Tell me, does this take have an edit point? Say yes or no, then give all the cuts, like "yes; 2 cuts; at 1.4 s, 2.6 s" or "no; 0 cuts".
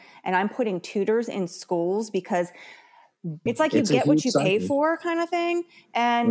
yes; 1 cut; at 3.5 s